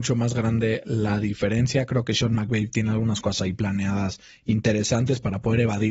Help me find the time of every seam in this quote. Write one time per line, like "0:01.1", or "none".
none